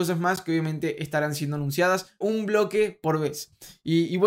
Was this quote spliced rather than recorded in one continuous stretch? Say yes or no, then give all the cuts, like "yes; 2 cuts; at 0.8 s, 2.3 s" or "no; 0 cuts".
yes; 1 cut; at 2.2 s